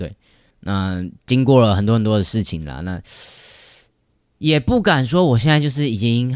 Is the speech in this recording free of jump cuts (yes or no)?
yes